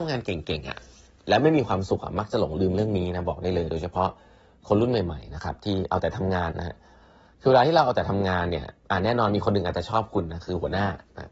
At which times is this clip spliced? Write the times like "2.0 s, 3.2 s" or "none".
6.5 s